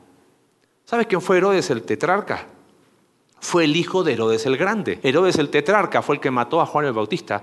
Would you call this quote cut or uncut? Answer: cut